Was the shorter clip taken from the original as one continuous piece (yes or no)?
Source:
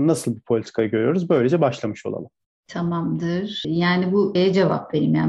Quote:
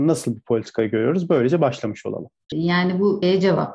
no